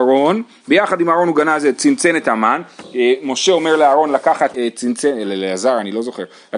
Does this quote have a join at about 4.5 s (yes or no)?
yes